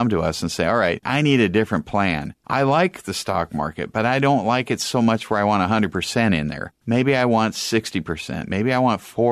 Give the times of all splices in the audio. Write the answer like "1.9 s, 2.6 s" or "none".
1.0 s